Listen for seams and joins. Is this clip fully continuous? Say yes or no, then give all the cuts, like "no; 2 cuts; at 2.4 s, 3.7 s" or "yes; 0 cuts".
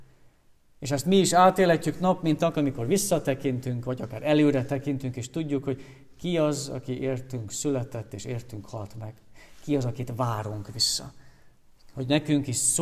yes; 0 cuts